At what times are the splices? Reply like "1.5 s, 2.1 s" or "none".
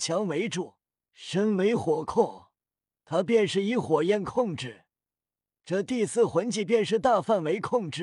1.1 s